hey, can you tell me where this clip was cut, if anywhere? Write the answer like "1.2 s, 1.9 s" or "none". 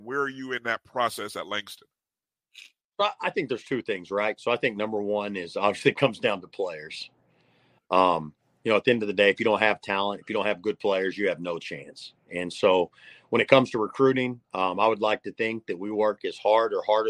none